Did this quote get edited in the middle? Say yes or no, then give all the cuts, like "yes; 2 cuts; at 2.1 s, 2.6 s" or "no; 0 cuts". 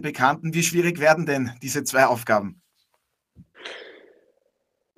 no; 0 cuts